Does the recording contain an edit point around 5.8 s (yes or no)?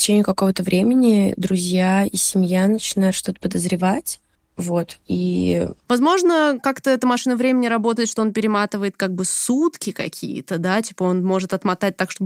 yes